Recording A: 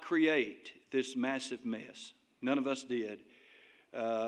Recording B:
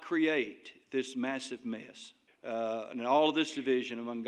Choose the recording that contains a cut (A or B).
B